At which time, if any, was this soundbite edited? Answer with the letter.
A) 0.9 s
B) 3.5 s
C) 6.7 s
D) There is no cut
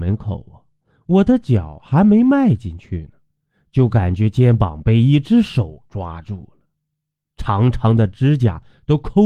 D